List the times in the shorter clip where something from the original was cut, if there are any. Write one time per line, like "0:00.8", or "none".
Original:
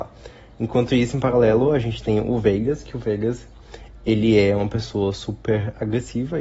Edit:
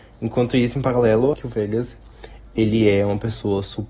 0:01.3